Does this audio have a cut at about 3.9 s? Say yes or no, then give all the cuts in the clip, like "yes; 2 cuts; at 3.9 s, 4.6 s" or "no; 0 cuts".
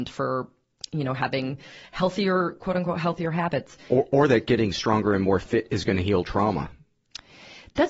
yes; 1 cut; at 3.9 s